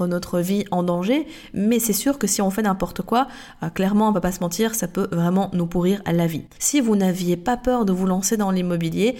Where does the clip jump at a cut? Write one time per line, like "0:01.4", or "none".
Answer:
0:06.6